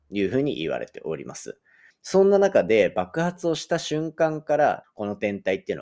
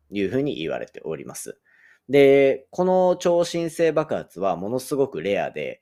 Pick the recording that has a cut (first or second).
first